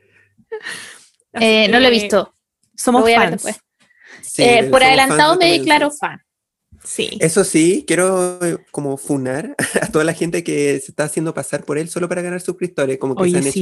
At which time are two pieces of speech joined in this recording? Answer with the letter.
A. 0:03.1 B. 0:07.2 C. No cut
C